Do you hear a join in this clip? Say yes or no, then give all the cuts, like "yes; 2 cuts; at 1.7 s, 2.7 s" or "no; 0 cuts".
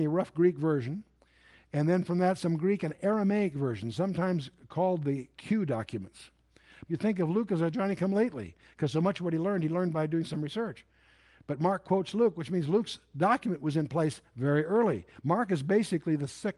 yes; 2 cuts; at 2.0 s, 6.9 s